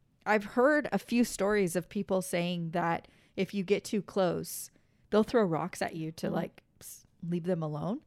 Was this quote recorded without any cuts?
yes; 0 cuts

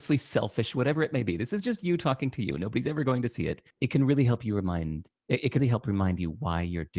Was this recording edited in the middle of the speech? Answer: yes; 2 cuts; at 3.7 s, 5.6 s

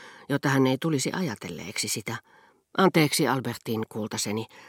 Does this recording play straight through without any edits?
yes; 0 cuts

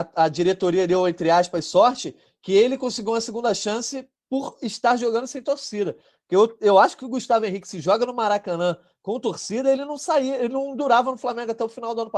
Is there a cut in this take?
no; 0 cuts

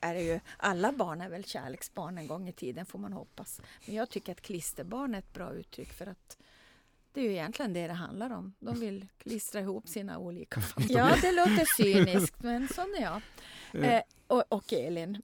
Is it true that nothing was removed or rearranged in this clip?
no; 1 cut; at 10.9 s

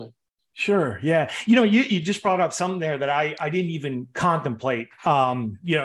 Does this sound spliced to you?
no; 0 cuts

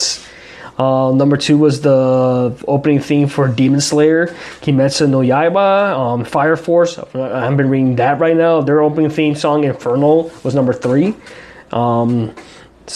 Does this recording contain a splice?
no; 0 cuts

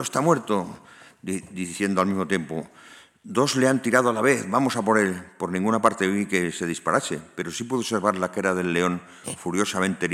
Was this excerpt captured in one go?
yes; 0 cuts

